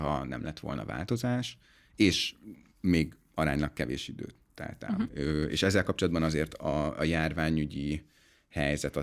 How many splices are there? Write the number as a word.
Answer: one